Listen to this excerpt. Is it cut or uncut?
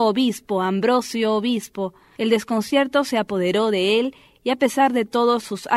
cut